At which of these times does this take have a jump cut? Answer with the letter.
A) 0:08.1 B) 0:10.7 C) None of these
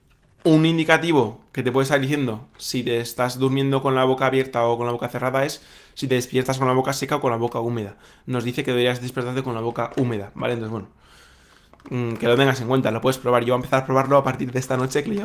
C